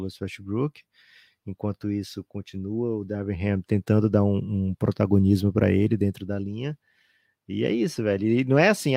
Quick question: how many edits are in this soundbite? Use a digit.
0